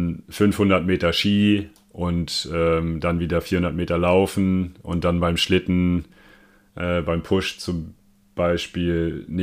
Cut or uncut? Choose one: uncut